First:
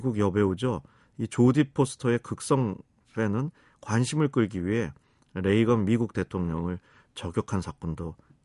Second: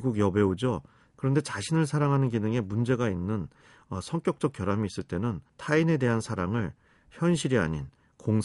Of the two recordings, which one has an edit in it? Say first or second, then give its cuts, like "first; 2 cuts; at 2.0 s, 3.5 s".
second; 2 cuts; at 1.1 s, 5.5 s